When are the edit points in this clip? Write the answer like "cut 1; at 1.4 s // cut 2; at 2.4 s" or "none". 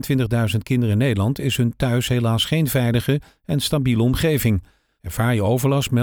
cut 1; at 5.0 s